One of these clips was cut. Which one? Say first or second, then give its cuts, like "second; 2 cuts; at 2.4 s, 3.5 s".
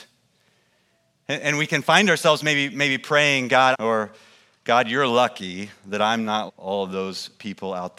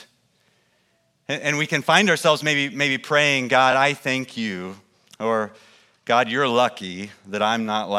first; 2 cuts; at 3.7 s, 6.5 s